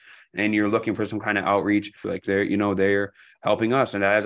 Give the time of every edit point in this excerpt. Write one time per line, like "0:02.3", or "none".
0:02.0

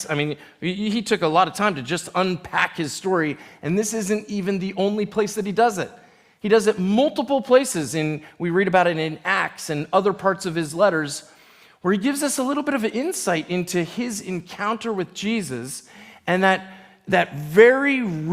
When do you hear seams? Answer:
none

